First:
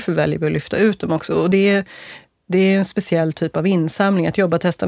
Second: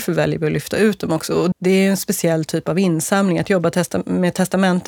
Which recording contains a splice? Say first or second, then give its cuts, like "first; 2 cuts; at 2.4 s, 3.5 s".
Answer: second; 1 cut; at 1.5 s